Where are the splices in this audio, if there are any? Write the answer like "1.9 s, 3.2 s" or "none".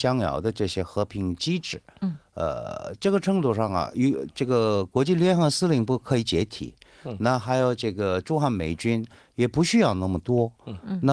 none